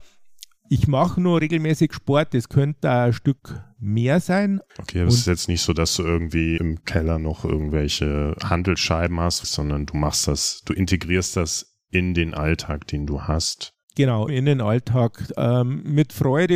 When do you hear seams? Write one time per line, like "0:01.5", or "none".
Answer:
0:06.6
0:09.4
0:14.3